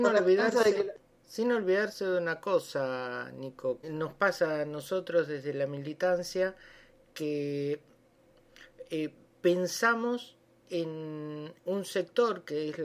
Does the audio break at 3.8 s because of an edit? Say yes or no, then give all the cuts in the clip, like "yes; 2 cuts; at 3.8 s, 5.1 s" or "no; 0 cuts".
yes; 2 cuts; at 3.8 s, 11.6 s